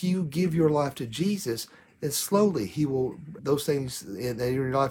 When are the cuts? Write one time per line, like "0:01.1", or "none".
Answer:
0:03.4